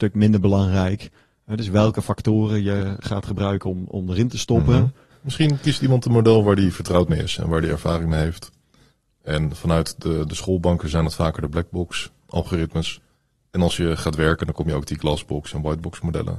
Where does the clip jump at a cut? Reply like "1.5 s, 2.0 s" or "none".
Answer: 5.1 s